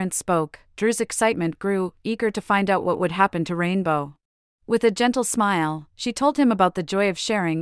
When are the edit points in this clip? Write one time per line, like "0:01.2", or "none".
0:04.6